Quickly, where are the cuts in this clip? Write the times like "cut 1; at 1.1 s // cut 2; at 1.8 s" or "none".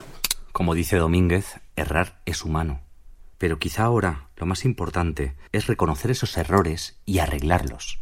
cut 1; at 3.3 s // cut 2; at 5.5 s

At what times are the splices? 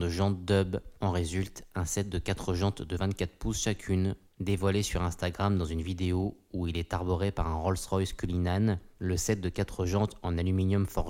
cut 1; at 4.3 s

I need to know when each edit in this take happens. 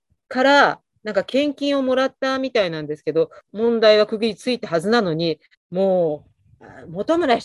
cut 1; at 3.5 s // cut 2; at 5.5 s

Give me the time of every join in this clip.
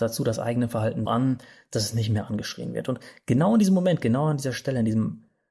cut 1; at 1.1 s

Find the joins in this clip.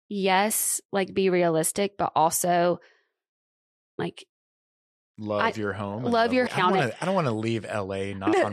cut 1; at 6.5 s

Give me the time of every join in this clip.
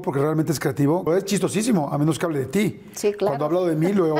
cut 1; at 1.1 s

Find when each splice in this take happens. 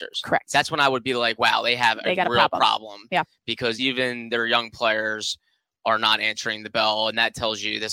none

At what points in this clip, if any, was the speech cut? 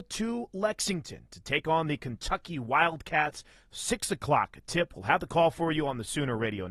none

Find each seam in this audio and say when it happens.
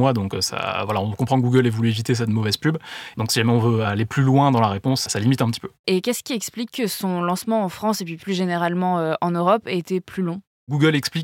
cut 1; at 3.1 s // cut 2; at 5.8 s

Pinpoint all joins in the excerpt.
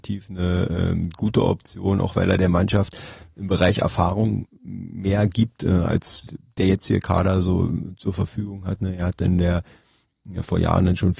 none

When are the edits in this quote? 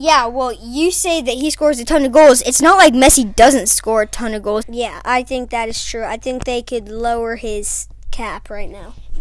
cut 1; at 4.6 s

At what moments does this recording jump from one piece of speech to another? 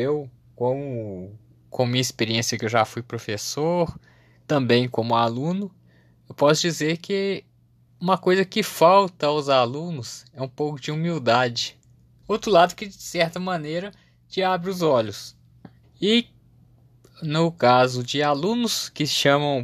cut 1; at 12.2 s // cut 2; at 15.8 s

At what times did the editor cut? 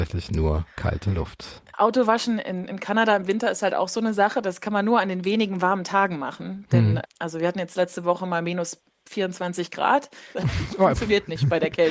cut 1; at 7.0 s // cut 2; at 10.3 s

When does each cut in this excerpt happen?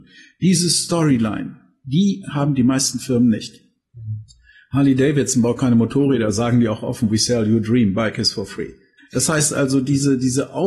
cut 1; at 9.0 s

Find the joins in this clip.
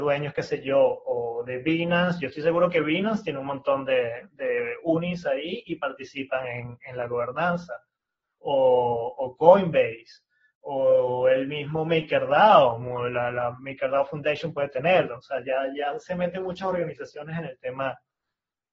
none

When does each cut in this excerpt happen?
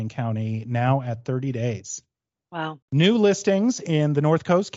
cut 1; at 2.8 s

